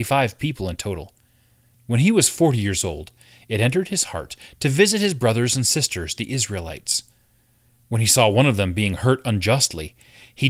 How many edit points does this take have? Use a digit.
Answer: 1